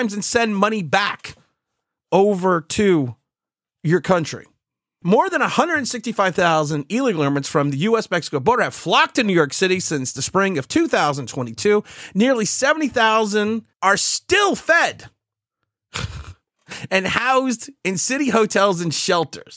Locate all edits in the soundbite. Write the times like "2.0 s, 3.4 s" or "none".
5.0 s, 13.7 s